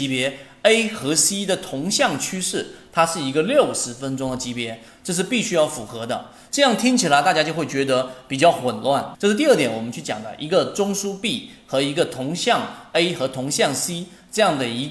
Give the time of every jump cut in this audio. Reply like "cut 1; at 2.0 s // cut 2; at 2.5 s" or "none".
cut 1; at 6.5 s // cut 2; at 9.1 s